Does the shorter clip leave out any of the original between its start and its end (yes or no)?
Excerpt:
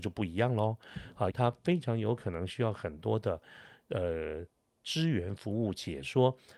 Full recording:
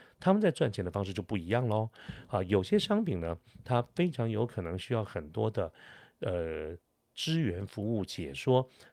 yes